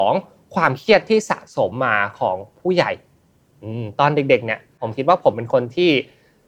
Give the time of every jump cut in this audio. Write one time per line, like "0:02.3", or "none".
none